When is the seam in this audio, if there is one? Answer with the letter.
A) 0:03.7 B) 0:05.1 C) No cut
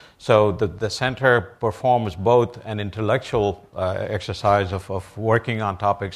C